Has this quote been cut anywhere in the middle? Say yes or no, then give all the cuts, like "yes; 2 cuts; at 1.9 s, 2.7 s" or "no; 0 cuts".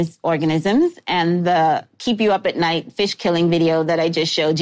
no; 0 cuts